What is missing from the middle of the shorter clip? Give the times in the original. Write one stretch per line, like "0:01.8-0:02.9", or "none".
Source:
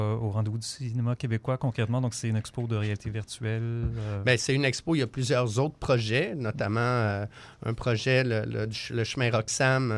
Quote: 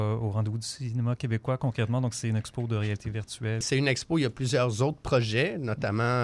0:03.6-0:04.4